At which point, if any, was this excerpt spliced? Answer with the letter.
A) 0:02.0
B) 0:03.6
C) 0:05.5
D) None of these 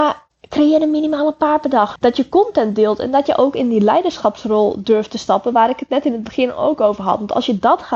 A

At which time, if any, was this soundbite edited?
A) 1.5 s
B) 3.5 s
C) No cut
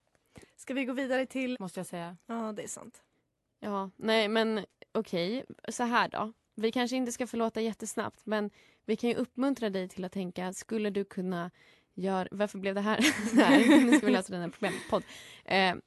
A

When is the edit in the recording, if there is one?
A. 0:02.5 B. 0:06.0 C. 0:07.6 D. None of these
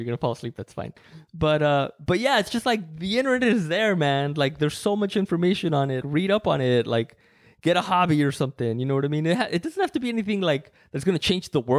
B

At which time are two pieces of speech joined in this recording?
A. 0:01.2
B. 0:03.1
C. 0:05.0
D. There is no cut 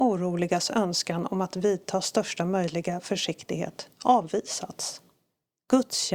D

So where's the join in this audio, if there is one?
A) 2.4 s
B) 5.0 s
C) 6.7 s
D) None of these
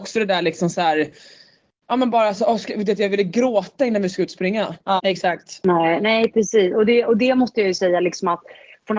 B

